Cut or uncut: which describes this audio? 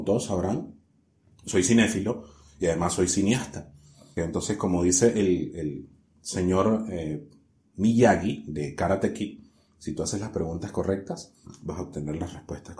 cut